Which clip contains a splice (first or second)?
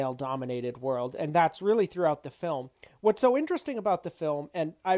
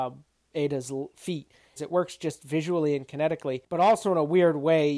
second